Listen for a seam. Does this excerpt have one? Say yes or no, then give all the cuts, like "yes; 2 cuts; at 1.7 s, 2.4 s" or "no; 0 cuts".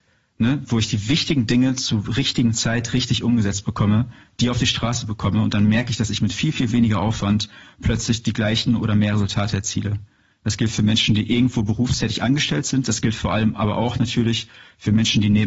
no; 0 cuts